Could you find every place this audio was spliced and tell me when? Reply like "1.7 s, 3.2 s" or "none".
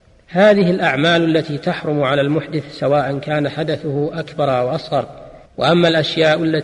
5.5 s